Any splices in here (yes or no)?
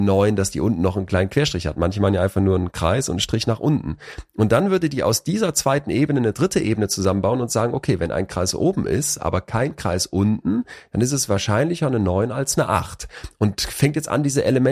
no